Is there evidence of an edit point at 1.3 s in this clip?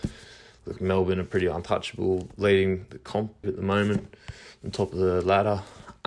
no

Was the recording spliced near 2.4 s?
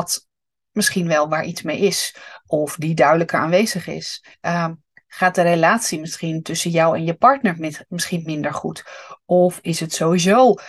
no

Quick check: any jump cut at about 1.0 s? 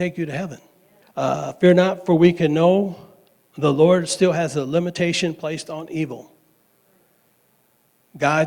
yes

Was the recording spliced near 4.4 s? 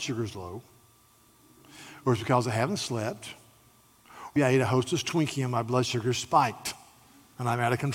yes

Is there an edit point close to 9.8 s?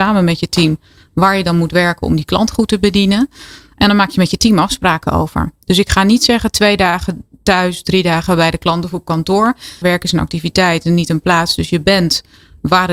yes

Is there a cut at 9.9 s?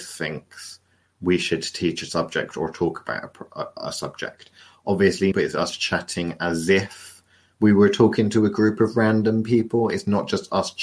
no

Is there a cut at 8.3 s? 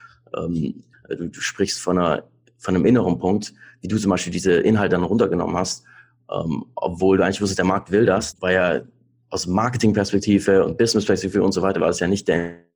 yes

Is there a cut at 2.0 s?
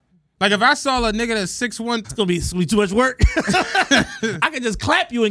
yes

